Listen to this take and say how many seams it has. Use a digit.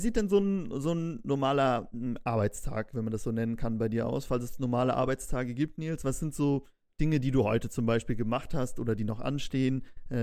0